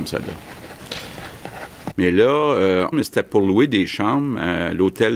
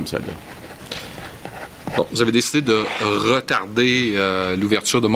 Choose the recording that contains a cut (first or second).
first